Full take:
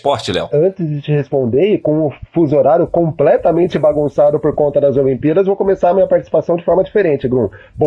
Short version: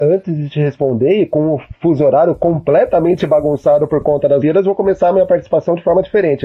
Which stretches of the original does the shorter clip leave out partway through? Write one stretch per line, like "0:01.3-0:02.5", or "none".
0:04.9-0:05.2